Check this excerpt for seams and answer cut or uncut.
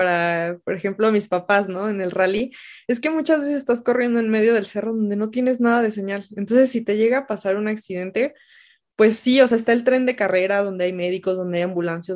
uncut